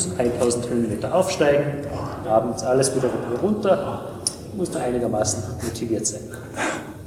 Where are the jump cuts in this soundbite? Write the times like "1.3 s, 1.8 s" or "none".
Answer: 2.2 s, 4.7 s